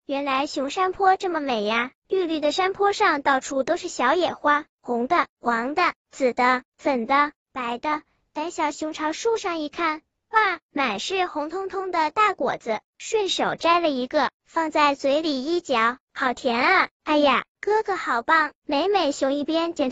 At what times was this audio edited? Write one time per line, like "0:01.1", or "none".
0:17.0